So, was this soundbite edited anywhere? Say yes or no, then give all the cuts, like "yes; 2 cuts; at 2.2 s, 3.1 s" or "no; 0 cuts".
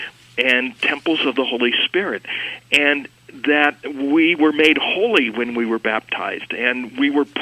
no; 0 cuts